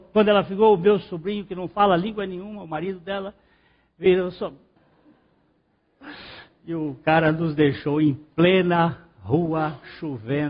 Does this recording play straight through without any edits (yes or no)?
no